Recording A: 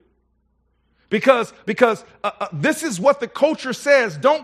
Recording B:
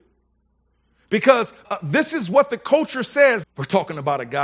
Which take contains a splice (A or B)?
B